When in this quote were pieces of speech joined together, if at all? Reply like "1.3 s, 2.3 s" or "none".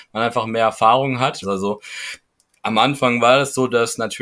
1.4 s